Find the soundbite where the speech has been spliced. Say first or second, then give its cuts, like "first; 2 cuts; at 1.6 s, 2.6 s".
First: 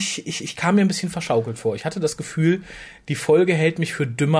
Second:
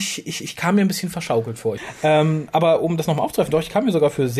second; 1 cut; at 1.8 s